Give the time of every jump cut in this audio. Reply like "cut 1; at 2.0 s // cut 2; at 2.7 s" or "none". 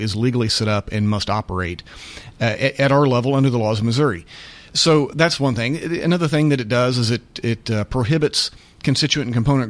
none